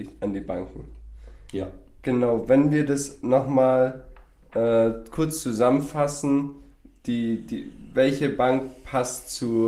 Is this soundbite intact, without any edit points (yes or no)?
yes